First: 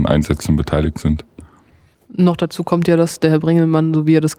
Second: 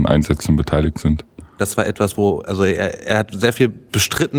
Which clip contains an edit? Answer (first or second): second